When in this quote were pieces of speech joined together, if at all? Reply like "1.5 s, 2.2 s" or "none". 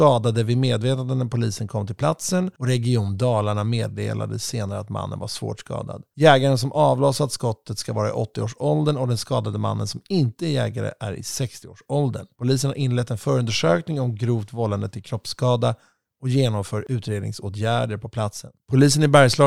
none